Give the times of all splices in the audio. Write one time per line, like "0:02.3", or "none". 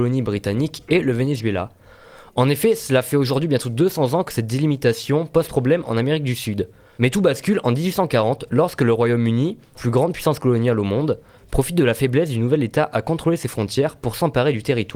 0:07.0
0:09.7